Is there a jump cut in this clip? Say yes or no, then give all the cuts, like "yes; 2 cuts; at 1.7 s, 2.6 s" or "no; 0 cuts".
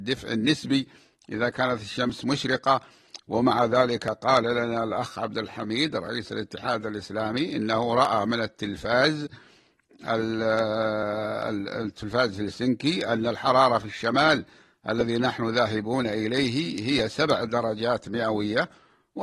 no; 0 cuts